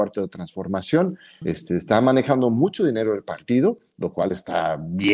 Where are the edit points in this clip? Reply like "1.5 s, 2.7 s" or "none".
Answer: 1.4 s